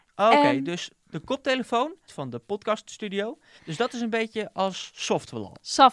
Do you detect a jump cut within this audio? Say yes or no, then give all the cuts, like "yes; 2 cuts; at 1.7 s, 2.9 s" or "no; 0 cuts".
yes; 2 cuts; at 2.1 s, 3.6 s